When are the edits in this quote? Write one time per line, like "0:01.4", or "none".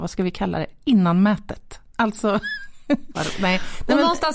0:01.9
0:03.1